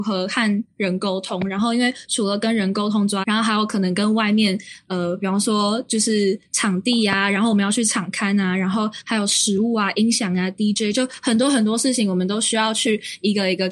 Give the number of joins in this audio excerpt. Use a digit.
1